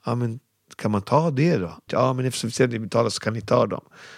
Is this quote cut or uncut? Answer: cut